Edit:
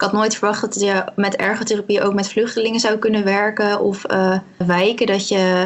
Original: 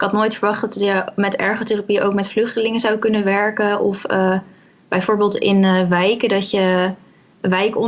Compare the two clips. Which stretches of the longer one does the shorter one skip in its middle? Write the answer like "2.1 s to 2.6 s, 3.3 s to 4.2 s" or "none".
4.6 s to 5.8 s